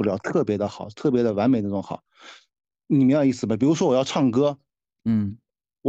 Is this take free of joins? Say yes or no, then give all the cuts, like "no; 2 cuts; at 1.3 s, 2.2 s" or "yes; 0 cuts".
yes; 0 cuts